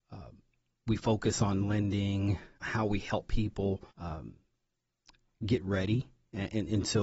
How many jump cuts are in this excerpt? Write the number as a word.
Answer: two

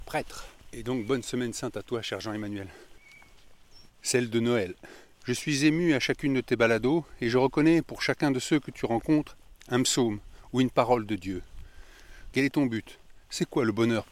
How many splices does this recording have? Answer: three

